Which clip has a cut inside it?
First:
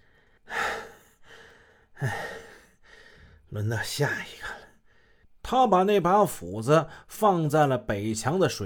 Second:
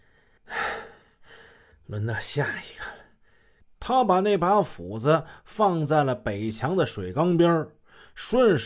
second; 1 cut; at 1.7 s

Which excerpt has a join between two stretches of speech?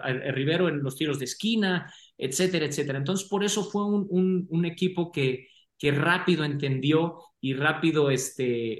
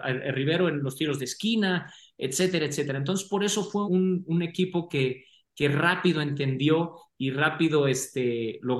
second; 1 cut; at 3.8 s

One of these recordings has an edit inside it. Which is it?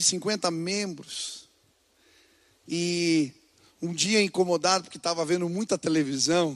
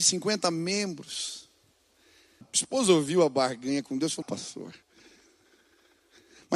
second; 2 cuts; at 2.4 s, 4.2 s

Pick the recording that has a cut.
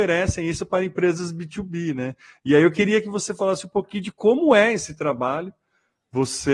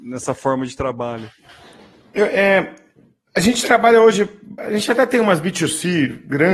second; 1 cut; at 4.6 s

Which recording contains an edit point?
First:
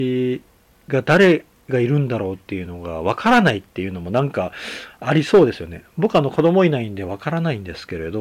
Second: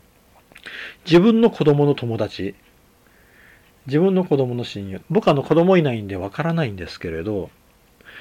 second; 1 cut; at 5.0 s

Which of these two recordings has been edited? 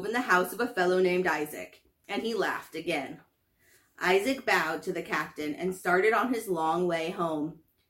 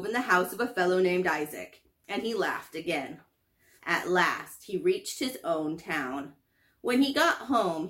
second; 1 cut; at 3.8 s

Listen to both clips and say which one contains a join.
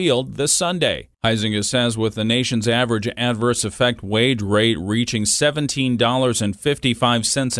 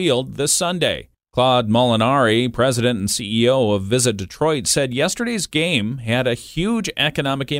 first; 1 cut; at 1.1 s

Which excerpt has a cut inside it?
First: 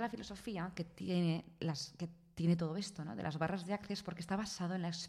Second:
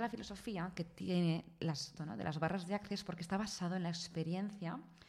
second; 1 cut; at 2.0 s

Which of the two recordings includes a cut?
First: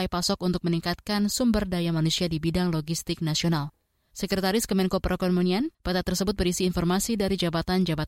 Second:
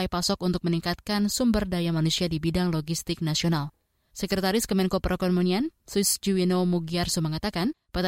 first; 1 cut; at 5.7 s

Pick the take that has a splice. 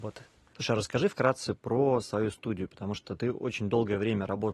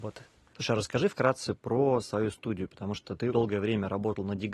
second; 1 cut; at 3.3 s

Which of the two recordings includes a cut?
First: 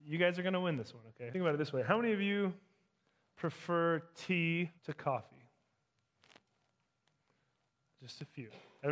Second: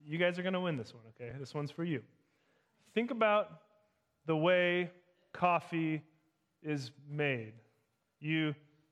first; 2 cuts; at 1.3 s, 4.8 s

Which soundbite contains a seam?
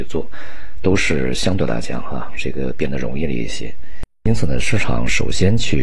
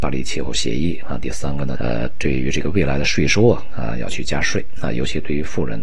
second; 1 cut; at 1.8 s

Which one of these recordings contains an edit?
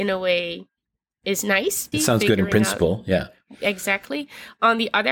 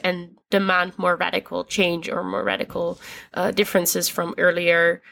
first; 1 cut; at 1.9 s

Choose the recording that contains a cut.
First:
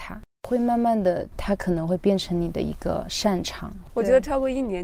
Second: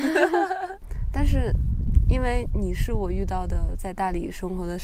first; 1 cut; at 3.9 s

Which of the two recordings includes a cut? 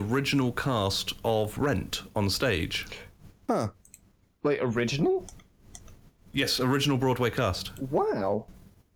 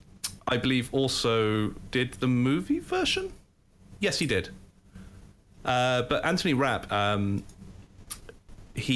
second; 2 cuts; at 5.6 s, 6.9 s

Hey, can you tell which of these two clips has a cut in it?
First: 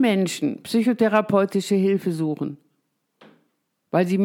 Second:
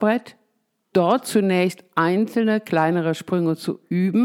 second; 1 cut; at 0.9 s

